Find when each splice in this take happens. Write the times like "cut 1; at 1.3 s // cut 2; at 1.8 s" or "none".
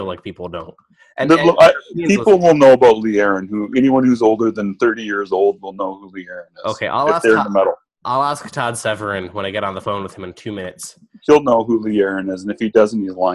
none